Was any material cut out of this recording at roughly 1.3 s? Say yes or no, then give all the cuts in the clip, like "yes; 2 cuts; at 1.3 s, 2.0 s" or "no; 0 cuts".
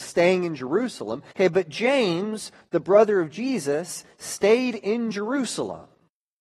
yes; 1 cut; at 1.3 s